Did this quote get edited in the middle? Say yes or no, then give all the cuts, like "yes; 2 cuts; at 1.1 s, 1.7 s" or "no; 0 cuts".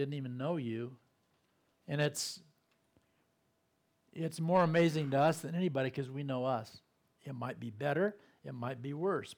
yes; 2 cuts; at 1.7 s, 7.2 s